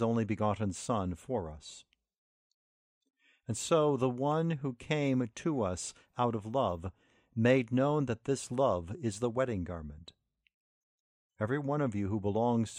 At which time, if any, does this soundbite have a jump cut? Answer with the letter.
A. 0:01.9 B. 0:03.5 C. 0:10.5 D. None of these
D